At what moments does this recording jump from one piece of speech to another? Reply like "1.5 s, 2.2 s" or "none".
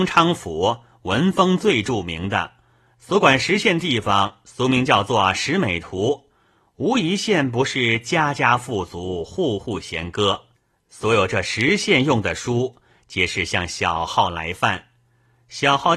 none

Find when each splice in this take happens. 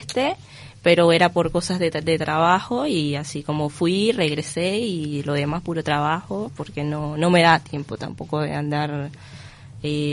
none

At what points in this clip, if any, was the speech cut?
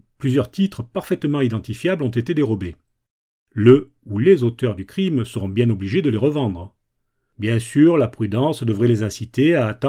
none

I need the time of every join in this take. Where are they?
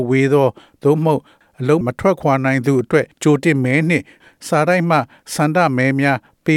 1.8 s, 3.1 s

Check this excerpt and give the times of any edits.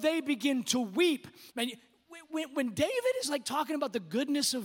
1.5 s

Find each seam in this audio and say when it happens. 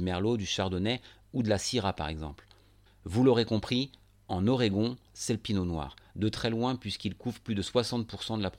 2.9 s, 5.1 s

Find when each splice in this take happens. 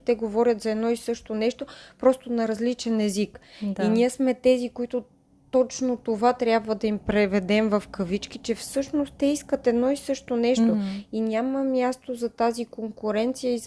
none

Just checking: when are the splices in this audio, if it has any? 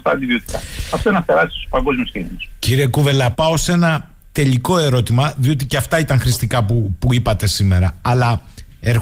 3.3 s

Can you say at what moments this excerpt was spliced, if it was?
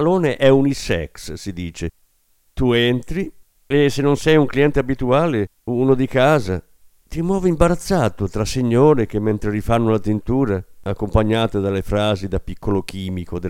none

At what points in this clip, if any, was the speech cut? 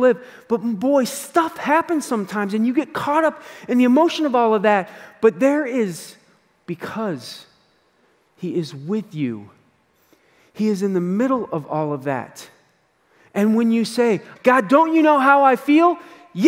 14.4 s

